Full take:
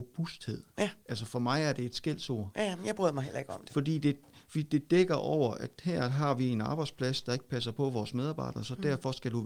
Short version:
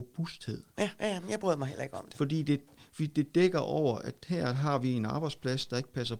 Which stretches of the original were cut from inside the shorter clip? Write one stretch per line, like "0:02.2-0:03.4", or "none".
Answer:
0:01.0-0:02.5